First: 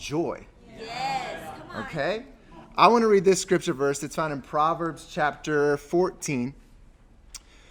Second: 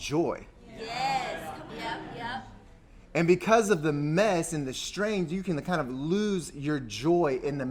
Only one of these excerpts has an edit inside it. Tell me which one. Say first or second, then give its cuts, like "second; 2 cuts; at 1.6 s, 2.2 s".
second; 1 cut; at 1.7 s